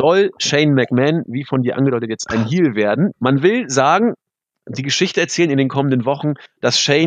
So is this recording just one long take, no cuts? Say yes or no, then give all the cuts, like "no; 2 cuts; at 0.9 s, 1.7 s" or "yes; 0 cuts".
no; 1 cut; at 3.1 s